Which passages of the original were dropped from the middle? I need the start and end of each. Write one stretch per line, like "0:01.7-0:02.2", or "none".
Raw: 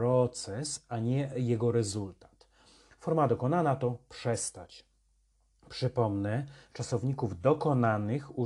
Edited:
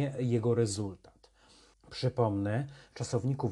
0:02.9-0:05.5